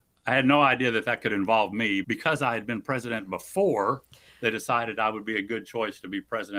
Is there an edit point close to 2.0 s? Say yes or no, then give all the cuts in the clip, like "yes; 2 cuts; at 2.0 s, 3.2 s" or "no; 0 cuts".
yes; 1 cut; at 2.0 s